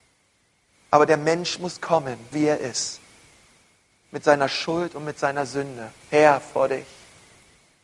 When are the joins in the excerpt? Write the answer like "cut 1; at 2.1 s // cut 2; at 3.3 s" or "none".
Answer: cut 1; at 2.3 s // cut 2; at 6.0 s